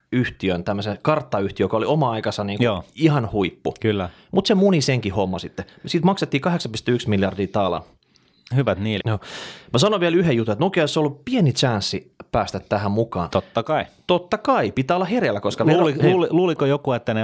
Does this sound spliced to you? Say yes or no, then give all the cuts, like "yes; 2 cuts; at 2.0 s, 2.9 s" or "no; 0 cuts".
yes; 2 cuts; at 9.0 s, 13.3 s